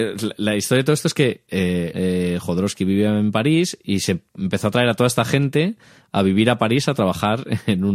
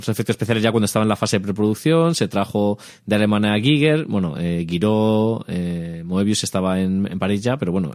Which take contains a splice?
first; 1 cut; at 1.9 s

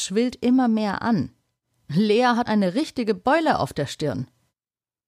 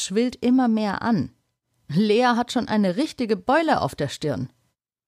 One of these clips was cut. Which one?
first; 1 cut; at 2.5 s

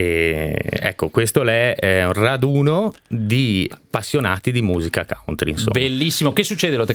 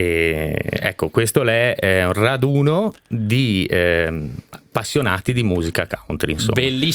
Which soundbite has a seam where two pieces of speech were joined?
first; 1 cut; at 3.7 s

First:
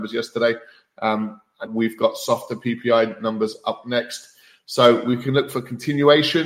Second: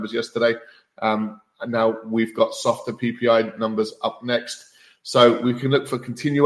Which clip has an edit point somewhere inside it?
first; 1 cut; at 1.7 s

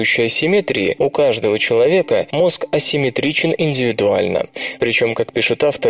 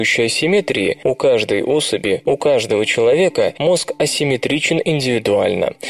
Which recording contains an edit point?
first; 1 cut; at 1.0 s

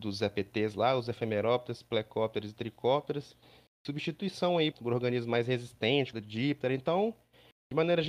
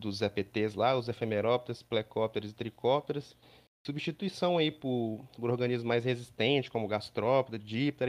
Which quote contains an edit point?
first; 2 cuts; at 4.7 s, 6.1 s

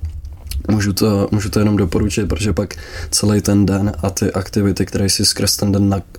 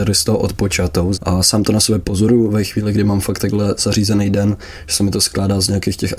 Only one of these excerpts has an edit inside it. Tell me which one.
second; 1 cut; at 1.1 s

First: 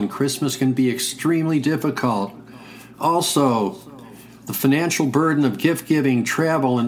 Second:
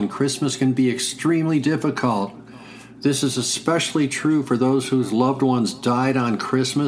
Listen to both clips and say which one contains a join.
first; 1 cut; at 2.9 s

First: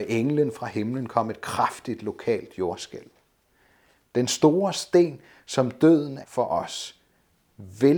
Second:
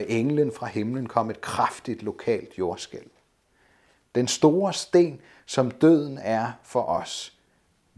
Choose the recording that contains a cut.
first; 1 cut; at 6.2 s

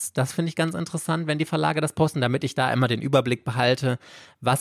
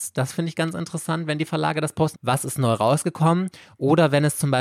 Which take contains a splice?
second; 1 cut; at 2.1 s

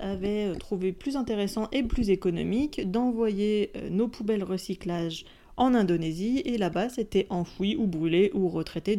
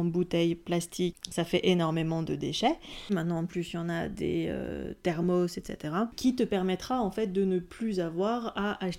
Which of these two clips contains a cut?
second; 1 cut; at 3.1 s

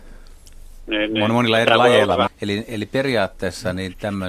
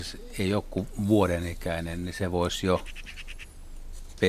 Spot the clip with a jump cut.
first; 1 cut; at 2.3 s

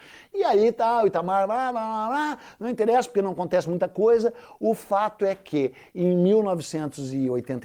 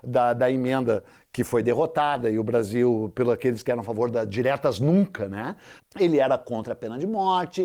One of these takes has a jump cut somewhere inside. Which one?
second; 1 cut; at 5.8 s

